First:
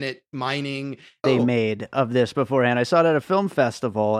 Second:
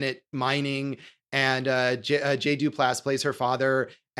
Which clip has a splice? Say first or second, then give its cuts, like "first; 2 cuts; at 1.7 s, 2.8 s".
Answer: first; 1 cut; at 1.2 s